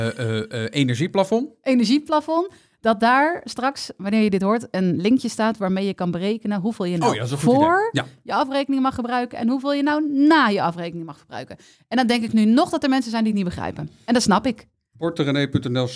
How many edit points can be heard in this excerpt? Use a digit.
0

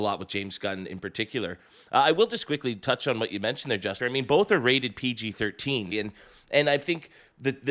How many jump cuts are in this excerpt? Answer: 2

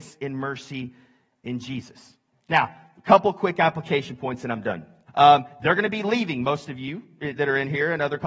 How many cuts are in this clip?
2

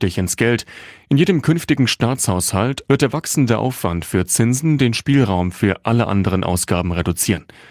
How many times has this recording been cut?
1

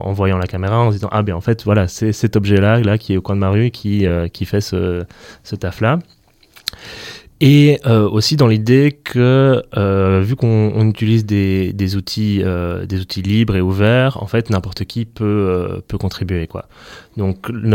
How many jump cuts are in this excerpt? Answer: 0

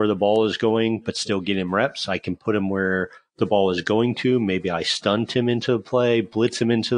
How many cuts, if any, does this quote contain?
0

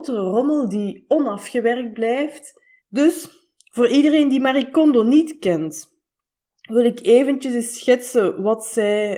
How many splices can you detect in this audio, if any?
1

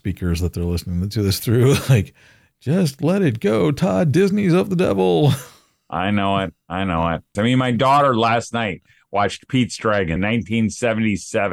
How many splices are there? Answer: 2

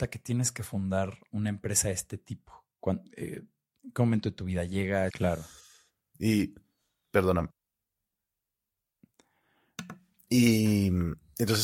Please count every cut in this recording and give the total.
1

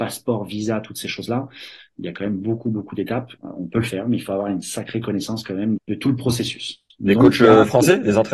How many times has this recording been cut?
2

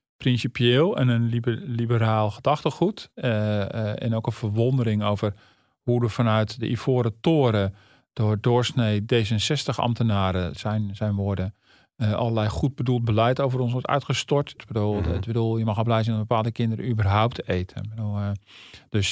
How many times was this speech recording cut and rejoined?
2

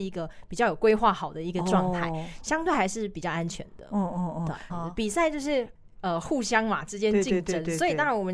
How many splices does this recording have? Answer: 1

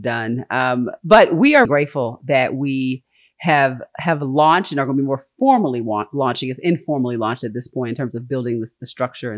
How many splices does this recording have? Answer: 1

